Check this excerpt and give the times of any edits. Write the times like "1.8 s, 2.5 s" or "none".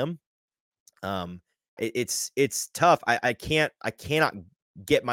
1.8 s

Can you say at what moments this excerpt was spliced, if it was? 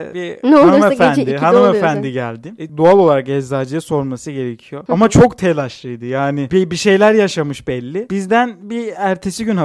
2.7 s

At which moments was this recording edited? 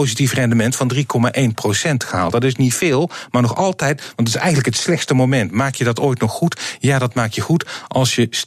none

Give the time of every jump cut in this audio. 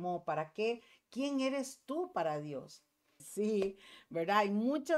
3.2 s

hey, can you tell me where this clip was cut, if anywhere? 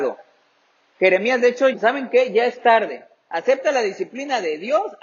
1.7 s

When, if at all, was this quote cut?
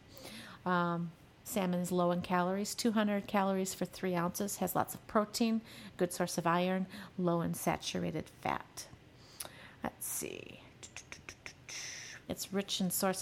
12.3 s

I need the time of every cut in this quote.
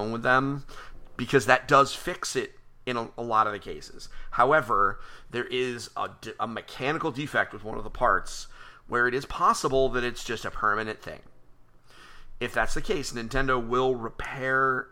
none

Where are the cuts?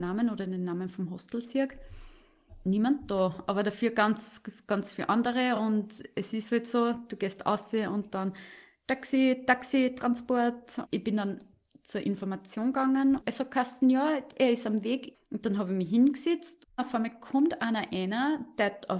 none

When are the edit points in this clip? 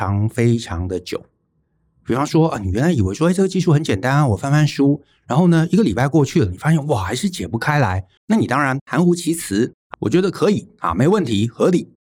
8.2 s, 9.9 s

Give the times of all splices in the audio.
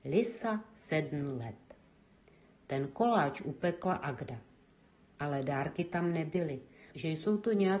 6.9 s

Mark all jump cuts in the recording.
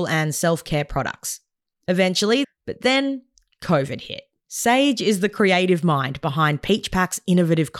2.4 s, 4.4 s

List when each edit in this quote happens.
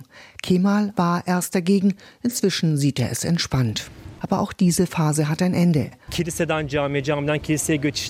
0.9 s, 4.2 s, 6.1 s

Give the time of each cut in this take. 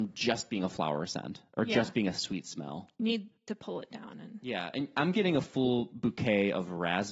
none

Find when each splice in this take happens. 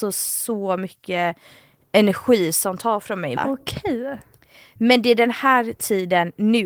3.4 s

